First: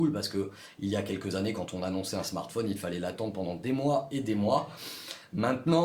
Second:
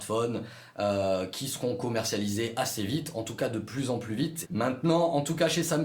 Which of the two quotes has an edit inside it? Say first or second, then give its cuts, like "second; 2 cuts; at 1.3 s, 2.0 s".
second; 1 cut; at 4.4 s